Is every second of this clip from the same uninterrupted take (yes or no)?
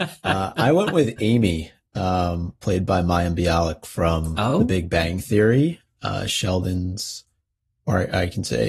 yes